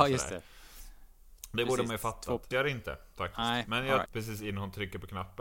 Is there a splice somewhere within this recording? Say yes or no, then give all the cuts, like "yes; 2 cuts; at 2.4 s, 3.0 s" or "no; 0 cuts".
yes; 2 cuts; at 2.5 s, 4.1 s